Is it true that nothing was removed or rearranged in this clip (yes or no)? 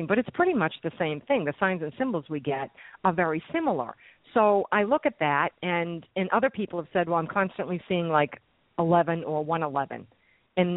yes